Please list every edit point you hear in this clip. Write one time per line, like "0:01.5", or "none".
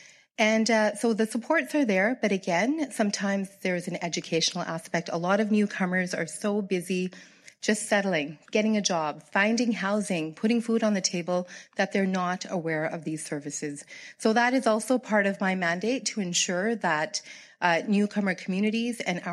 none